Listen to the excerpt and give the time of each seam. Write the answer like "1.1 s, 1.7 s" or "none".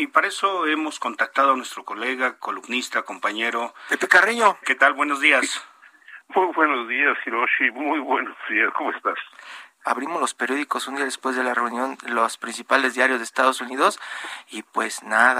4.6 s, 9.8 s